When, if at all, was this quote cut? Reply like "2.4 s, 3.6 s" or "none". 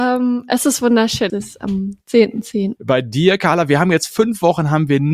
1.3 s, 2.8 s